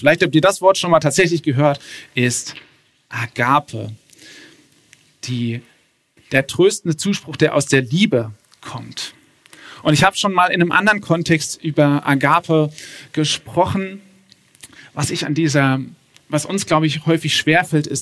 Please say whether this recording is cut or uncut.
uncut